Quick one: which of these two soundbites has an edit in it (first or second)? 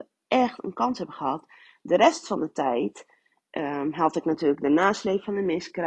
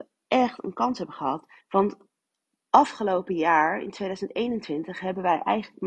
second